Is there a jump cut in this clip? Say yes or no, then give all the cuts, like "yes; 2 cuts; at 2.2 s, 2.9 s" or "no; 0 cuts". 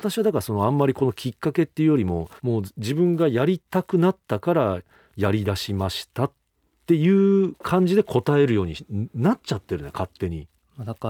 yes; 1 cut; at 2.4 s